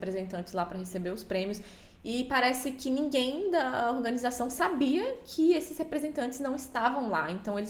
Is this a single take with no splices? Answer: yes; 0 cuts

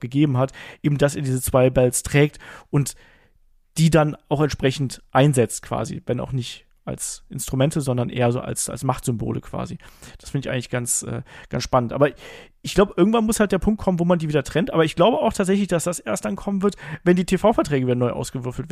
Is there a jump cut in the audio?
no; 0 cuts

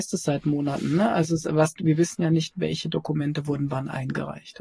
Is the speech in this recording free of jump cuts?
yes; 0 cuts

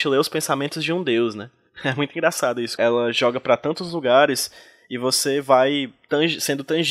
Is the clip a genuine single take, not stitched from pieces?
no; 1 cut; at 2.8 s

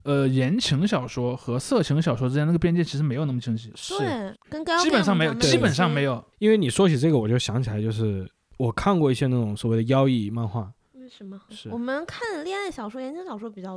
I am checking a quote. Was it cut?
yes; 2 cuts; at 4.3 s, 11.5 s

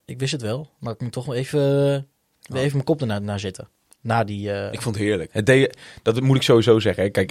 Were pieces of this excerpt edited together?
yes; 1 cut; at 5.3 s

